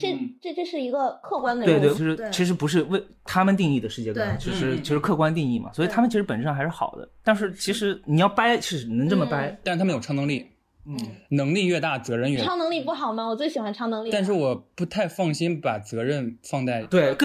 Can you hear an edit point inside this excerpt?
yes; 1 cut; at 1.9 s

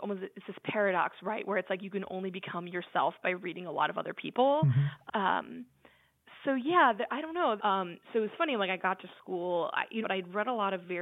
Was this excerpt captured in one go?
no; 3 cuts; at 5.1 s, 7.6 s, 10.0 s

